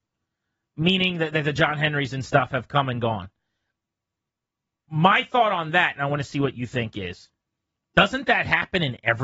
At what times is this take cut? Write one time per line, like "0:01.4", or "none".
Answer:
none